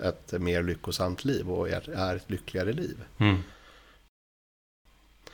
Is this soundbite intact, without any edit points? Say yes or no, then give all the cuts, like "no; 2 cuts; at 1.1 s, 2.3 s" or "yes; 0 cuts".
yes; 0 cuts